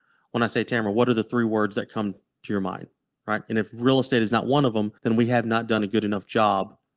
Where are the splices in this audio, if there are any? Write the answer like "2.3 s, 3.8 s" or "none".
5.0 s